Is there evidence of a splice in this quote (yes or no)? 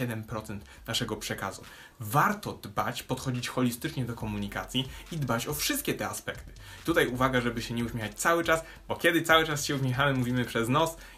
yes